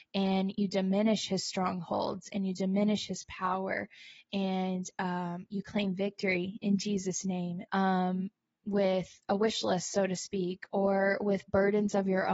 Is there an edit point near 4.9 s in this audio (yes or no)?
no